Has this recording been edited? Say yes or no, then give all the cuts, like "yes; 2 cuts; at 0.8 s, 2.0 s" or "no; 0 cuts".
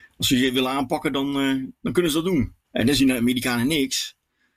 yes; 1 cut; at 2.6 s